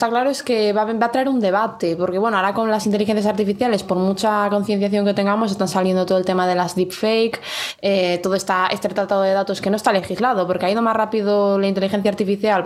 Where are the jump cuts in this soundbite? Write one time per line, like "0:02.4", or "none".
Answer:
none